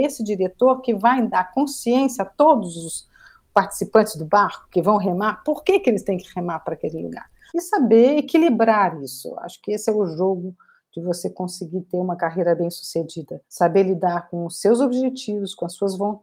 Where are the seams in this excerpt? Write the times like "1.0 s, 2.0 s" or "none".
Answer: 7.5 s, 13.4 s